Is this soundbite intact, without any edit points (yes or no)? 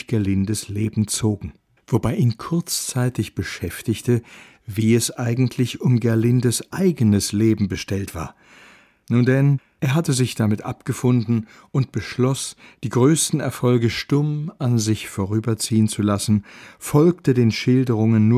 yes